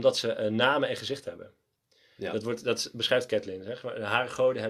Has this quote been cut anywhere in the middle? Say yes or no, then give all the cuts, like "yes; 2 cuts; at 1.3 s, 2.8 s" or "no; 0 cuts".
no; 0 cuts